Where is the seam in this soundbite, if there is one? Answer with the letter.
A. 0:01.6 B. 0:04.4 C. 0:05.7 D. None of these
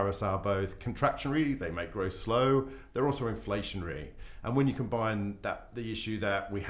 D